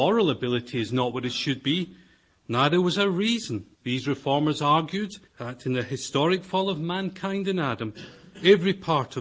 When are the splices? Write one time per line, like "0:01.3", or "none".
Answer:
0:03.7
0:05.3